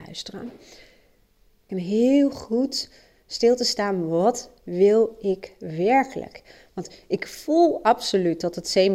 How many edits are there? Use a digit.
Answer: 1